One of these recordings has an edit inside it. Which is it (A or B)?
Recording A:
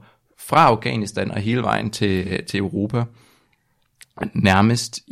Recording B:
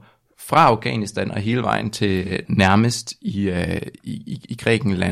B